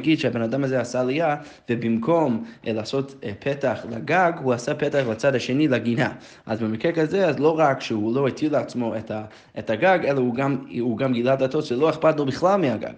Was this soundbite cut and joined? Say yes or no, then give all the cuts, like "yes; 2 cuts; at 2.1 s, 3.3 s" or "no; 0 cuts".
no; 0 cuts